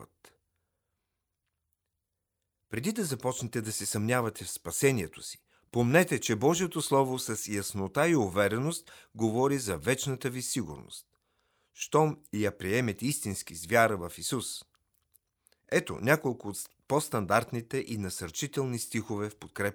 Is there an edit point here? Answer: no; 0 cuts

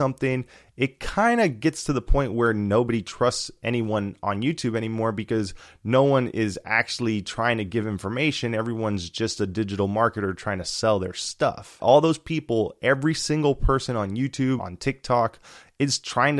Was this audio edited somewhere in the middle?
yes; 2 cuts; at 11.8 s, 14.6 s

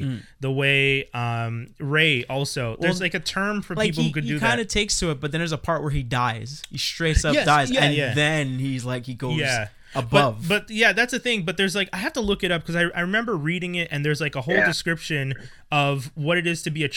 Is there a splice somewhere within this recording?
no; 0 cuts

